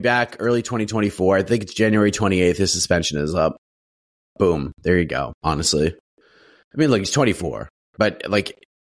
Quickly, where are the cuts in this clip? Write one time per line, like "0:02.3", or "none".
0:05.4

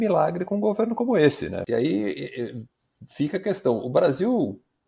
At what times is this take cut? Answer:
0:01.7

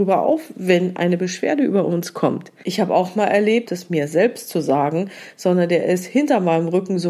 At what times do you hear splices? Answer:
0:02.6
0:03.7

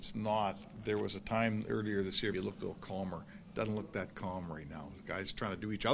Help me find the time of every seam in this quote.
0:02.3

